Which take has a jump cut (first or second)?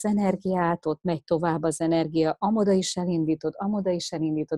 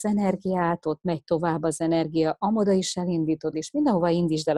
second